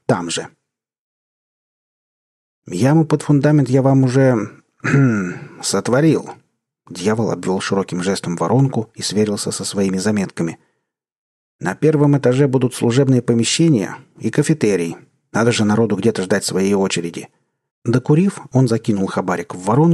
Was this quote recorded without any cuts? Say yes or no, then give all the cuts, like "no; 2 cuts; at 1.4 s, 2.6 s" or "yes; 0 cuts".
no; 1 cut; at 17.7 s